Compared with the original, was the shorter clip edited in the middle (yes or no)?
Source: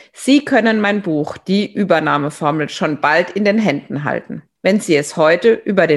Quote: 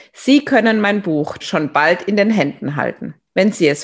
yes